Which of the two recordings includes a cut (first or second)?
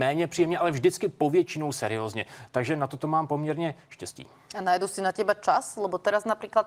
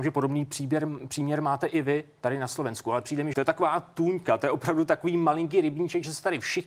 second